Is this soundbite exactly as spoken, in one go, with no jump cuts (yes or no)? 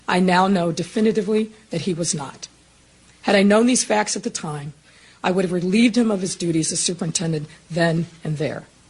yes